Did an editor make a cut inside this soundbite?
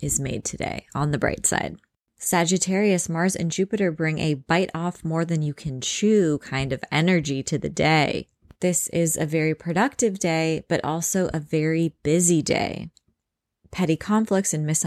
no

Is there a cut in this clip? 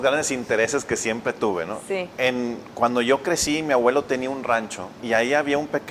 yes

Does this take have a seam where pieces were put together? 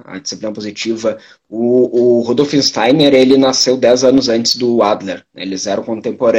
no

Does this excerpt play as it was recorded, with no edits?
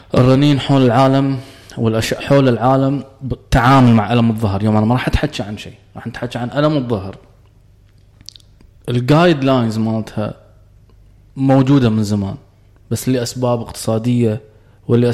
no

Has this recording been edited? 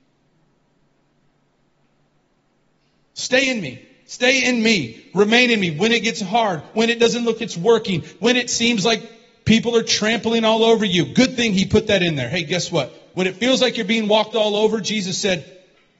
yes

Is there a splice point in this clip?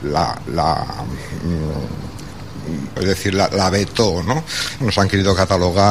yes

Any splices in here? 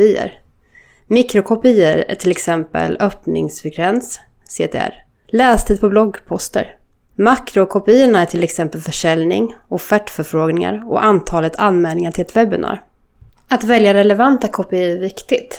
yes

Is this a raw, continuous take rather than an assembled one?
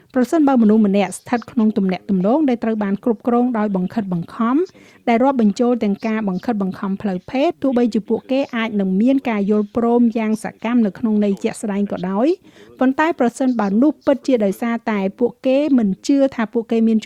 no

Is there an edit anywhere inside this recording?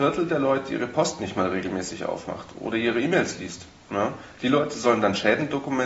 no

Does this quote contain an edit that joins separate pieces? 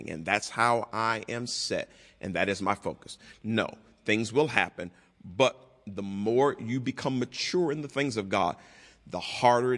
yes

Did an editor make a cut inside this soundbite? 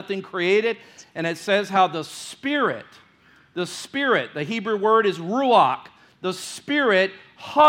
no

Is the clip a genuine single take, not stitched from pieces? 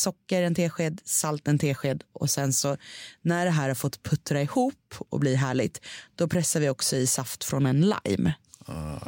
yes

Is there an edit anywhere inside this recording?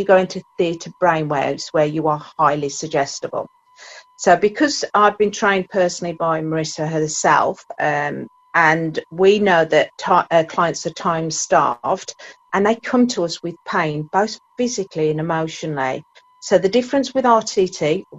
yes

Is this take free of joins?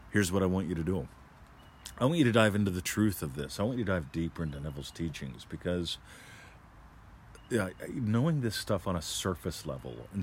yes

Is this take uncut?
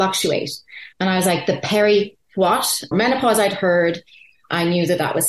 no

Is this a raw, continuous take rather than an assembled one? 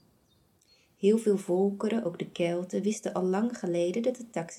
yes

